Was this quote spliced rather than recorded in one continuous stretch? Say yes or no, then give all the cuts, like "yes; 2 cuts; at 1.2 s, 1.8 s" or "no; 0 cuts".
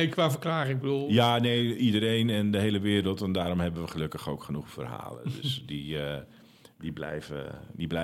no; 0 cuts